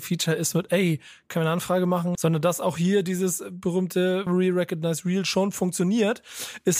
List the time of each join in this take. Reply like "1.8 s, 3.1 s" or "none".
2.2 s, 4.3 s